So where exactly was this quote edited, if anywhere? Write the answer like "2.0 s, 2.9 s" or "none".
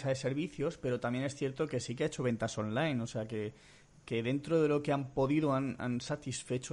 none